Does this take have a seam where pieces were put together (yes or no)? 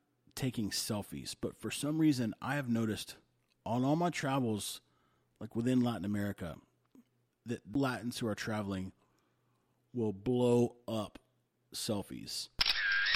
no